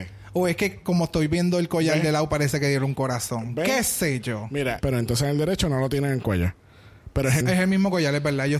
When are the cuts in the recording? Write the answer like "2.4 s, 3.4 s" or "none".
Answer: 4.8 s, 7.4 s